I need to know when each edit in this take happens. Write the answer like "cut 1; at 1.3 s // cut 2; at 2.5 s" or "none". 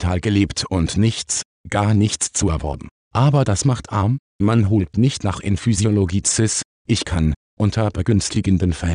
cut 1; at 6.7 s